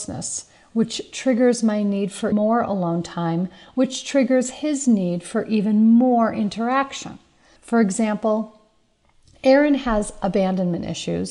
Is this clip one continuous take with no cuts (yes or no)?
no